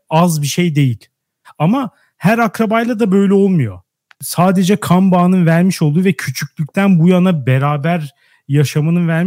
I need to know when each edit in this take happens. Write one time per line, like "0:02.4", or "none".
0:01.4
0:04.1